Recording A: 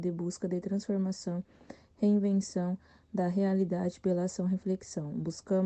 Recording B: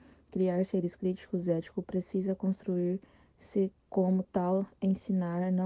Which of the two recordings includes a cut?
B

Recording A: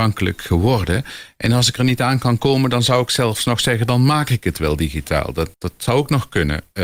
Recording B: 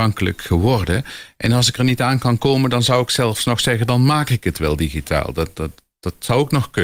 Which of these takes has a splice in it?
A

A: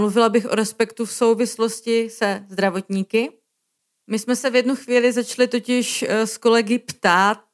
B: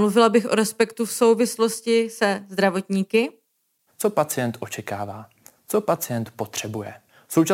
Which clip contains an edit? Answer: B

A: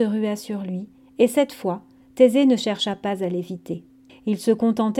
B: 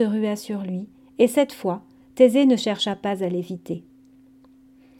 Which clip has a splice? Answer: A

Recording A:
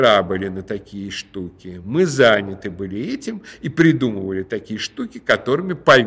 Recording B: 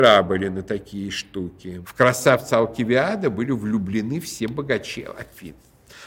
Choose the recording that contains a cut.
B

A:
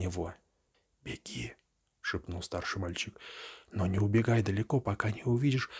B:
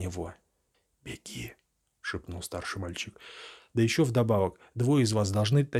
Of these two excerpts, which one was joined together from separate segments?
B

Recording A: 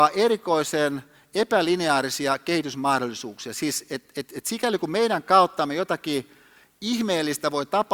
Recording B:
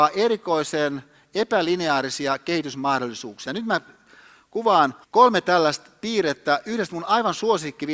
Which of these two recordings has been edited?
B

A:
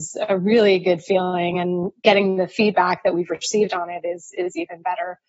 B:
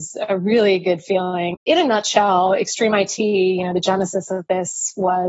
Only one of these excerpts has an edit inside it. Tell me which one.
B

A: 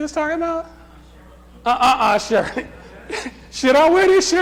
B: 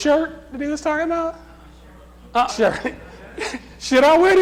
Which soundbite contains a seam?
B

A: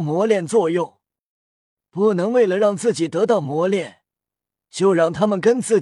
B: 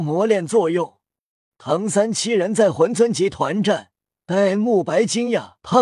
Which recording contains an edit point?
B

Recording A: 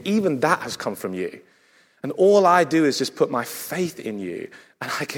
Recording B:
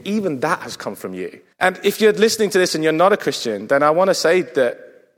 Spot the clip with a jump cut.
B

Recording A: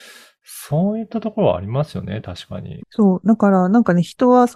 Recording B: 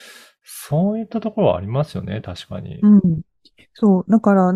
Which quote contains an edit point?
A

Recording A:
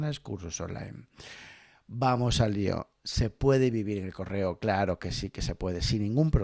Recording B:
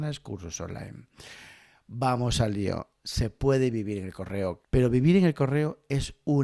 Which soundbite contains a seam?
B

